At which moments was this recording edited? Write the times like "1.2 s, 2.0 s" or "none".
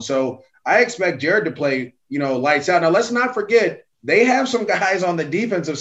3.9 s